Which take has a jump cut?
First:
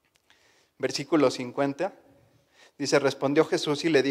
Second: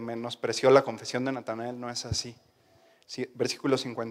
second; 1 cut; at 3.0 s

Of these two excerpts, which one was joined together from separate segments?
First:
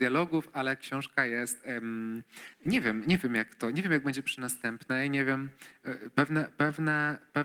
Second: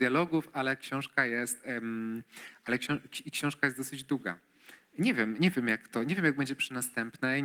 first; 1 cut; at 2.5 s

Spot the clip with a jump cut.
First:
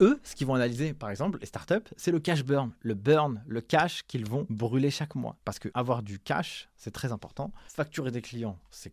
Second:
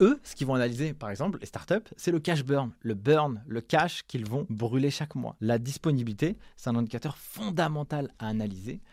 first; 1 cut; at 5.4 s

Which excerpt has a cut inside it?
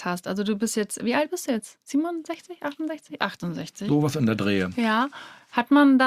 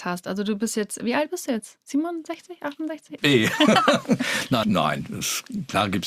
second; 2 cuts; at 3.2 s, 4.6 s

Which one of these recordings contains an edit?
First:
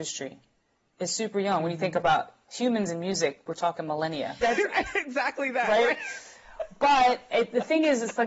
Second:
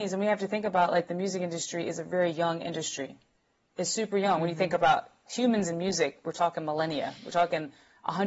first; 1 cut; at 4.4 s

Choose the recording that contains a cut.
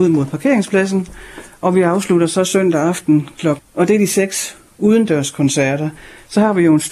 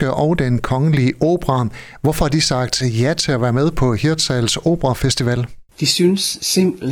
first; 1 cut; at 3.6 s

